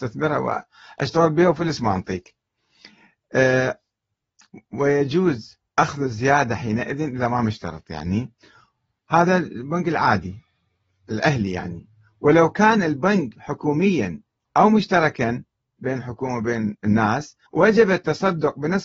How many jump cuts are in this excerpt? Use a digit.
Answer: 2